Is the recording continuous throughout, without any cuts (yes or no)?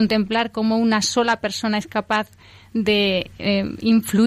yes